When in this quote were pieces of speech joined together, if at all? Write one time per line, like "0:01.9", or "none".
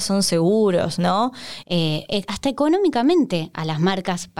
0:01.6

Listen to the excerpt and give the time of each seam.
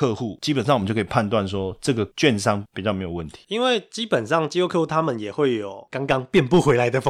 none

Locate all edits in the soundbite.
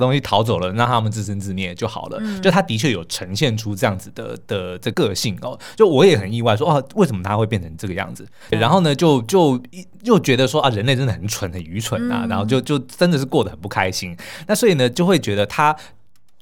0:04.9
0:08.5

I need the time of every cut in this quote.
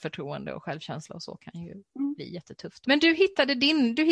0:02.8

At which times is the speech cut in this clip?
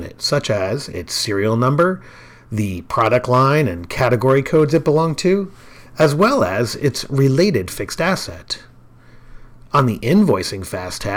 none

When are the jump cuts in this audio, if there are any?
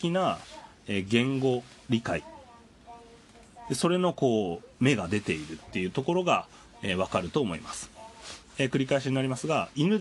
none

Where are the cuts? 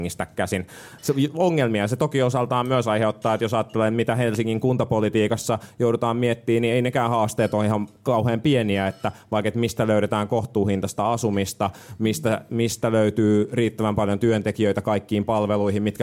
0:01.0

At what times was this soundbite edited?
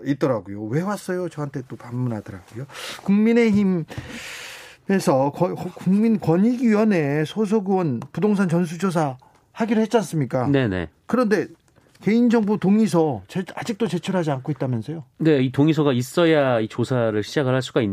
none

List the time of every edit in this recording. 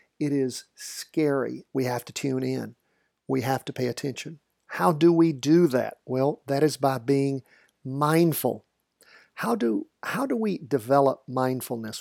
0:01.7

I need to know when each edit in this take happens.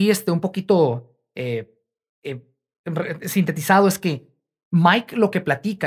none

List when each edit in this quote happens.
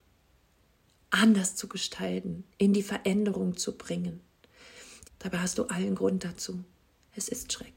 0:05.0

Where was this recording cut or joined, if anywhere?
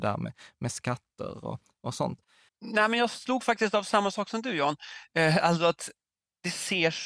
0:02.5

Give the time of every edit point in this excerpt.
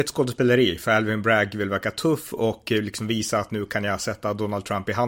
none

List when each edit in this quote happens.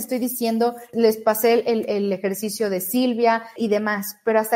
0:00.9
0:03.6

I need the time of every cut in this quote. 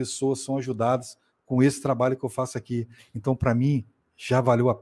none

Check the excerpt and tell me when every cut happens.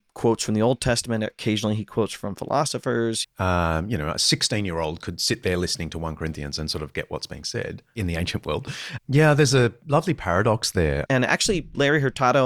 0:03.2
0:09.0
0:11.1

